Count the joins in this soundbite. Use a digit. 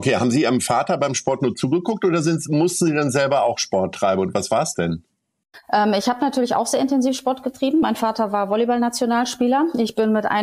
0